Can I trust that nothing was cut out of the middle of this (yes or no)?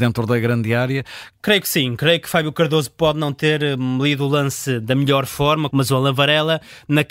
no